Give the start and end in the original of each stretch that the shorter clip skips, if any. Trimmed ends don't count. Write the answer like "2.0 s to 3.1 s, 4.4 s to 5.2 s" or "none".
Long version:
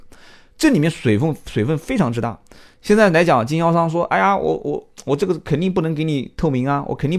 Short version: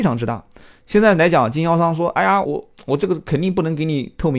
4.4 s to 4.6 s